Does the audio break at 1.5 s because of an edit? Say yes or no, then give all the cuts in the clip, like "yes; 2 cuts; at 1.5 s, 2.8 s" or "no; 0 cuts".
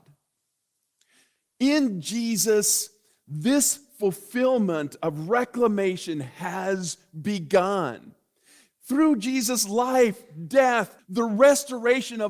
no; 1 cut; at 11.0 s